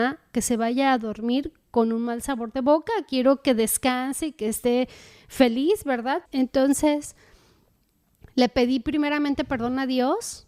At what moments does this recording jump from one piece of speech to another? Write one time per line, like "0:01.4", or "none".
0:06.3